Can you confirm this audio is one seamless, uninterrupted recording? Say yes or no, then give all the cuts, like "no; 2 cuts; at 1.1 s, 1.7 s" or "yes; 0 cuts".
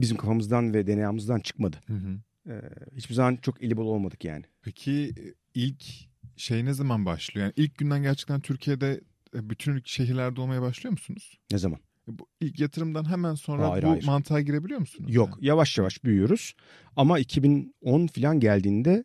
yes; 0 cuts